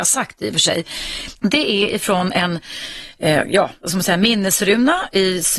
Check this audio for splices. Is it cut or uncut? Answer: cut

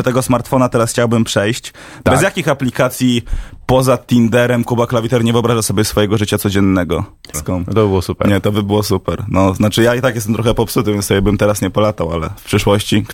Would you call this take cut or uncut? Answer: cut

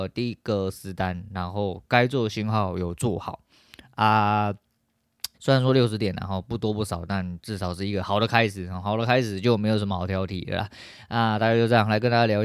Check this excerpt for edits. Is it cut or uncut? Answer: cut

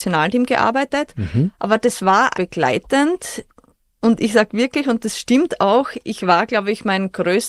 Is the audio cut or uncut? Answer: cut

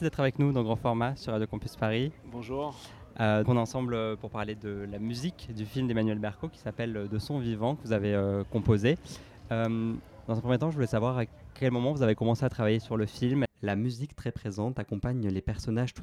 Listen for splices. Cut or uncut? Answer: cut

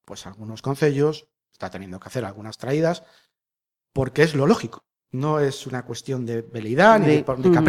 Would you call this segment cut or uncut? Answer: uncut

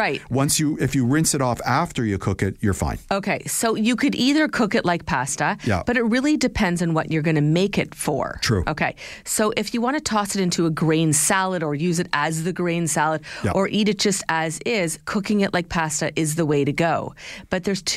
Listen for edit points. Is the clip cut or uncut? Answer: uncut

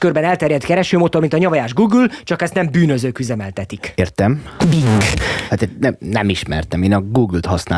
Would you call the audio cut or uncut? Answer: uncut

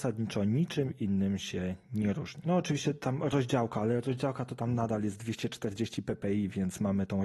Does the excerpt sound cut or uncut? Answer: uncut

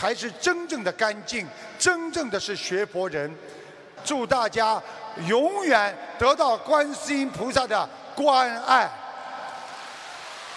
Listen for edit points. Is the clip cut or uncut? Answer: cut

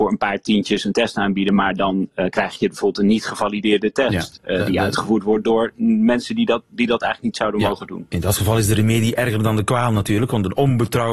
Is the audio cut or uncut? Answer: uncut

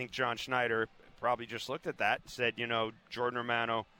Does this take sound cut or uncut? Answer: uncut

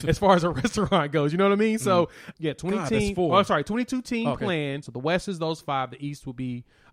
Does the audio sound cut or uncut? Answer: cut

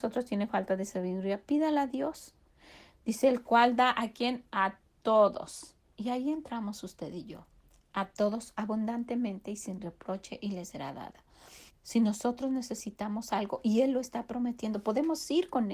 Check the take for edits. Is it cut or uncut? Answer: cut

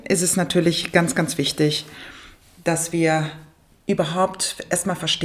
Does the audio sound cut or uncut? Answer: uncut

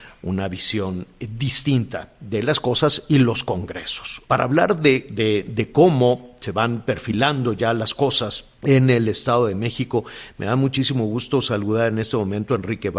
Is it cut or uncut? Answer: cut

